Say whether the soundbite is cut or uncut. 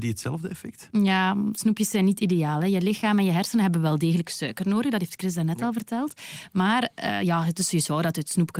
uncut